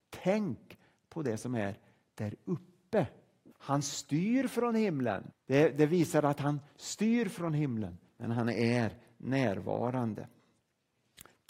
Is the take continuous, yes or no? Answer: no